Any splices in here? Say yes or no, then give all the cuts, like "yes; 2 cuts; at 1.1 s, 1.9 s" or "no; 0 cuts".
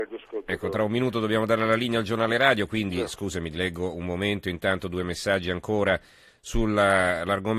no; 0 cuts